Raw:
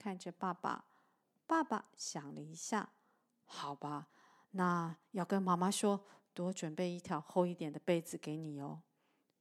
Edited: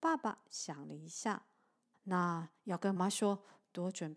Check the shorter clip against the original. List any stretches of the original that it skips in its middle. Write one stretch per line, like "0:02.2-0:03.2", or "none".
0:03.4-0:04.4
0:05.4-0:05.6